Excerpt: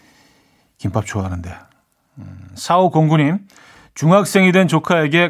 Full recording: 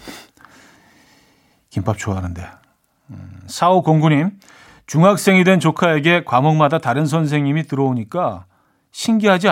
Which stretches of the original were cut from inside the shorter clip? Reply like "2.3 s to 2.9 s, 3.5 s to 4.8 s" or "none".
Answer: none